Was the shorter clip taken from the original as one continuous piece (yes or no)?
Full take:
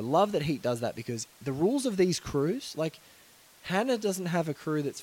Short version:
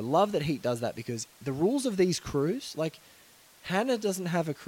yes